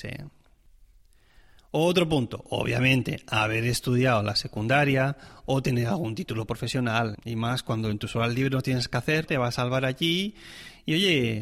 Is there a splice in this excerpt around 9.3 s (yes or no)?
yes